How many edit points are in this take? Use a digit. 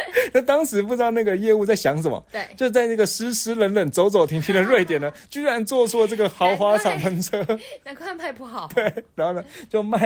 0